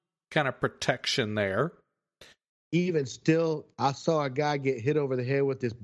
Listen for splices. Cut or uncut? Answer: uncut